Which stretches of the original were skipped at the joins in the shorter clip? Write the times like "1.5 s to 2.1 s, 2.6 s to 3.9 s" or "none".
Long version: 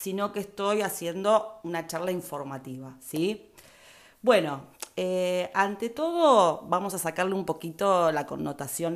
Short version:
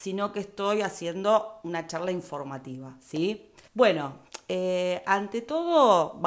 3.7 s to 4.2 s